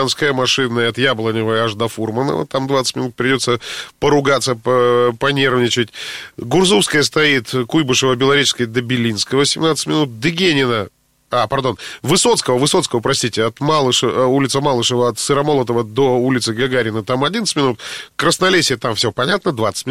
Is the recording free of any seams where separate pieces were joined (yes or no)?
yes